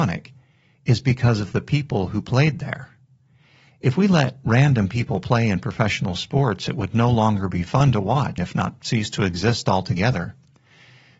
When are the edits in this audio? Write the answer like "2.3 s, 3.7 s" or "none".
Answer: 8.4 s